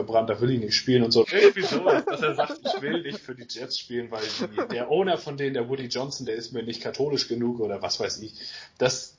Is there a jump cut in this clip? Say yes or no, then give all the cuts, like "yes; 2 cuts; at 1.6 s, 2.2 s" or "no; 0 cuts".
yes; 1 cut; at 1.2 s